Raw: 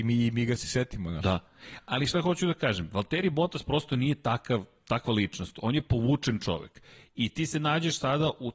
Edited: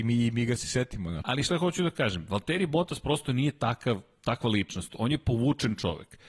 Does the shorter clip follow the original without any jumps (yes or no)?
no